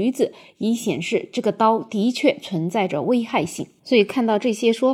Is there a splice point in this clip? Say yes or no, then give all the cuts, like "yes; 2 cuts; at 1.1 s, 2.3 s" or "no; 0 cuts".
no; 0 cuts